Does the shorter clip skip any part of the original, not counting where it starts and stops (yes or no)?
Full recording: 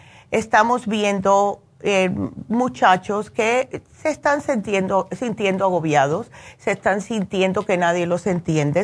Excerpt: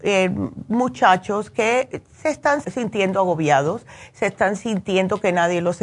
yes